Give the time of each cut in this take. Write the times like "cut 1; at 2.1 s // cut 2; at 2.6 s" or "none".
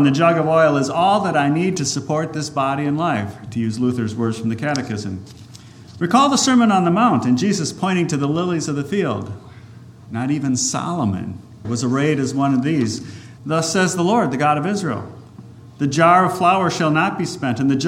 cut 1; at 10.1 s // cut 2; at 11.6 s // cut 3; at 13.4 s